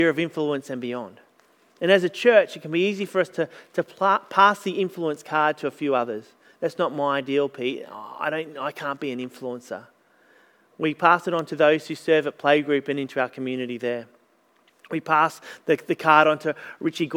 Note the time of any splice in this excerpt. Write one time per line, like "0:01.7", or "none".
none

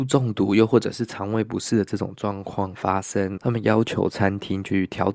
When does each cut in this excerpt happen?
0:03.4

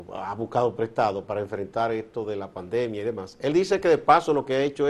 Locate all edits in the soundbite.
none

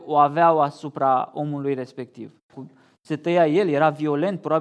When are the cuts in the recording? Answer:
0:02.5

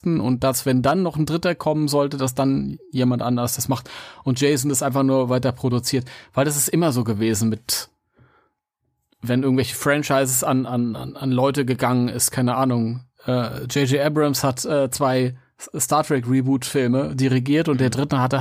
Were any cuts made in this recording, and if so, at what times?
none

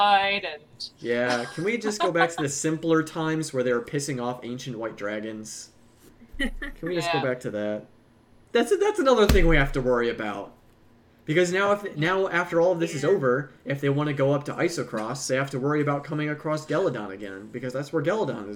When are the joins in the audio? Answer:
none

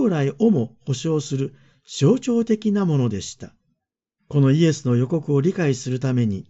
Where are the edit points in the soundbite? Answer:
0:04.2

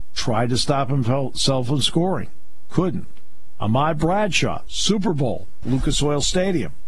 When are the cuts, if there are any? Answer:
0:05.6

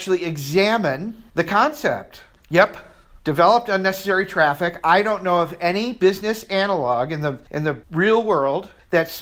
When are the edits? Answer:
0:02.3

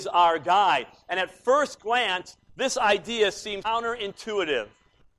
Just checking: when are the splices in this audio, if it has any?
0:03.6

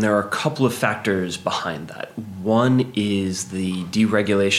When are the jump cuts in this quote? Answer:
none

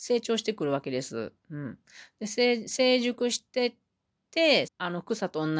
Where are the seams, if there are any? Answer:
0:01.4
0:04.7

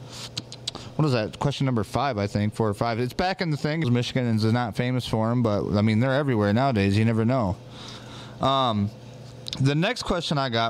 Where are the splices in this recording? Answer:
0:03.8

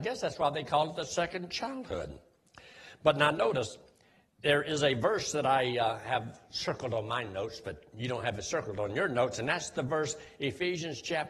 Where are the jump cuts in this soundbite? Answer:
none

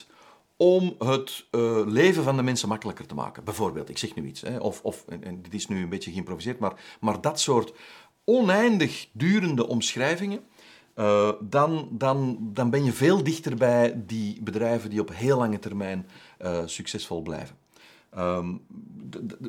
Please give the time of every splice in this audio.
none

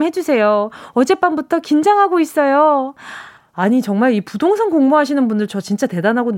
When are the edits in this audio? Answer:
0:03.4

